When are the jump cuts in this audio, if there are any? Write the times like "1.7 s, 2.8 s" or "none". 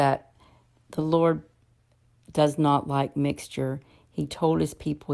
none